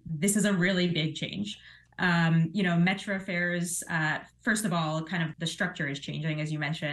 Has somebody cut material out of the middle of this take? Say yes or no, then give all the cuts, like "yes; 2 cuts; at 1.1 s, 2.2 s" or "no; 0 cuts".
yes; 1 cut; at 5.3 s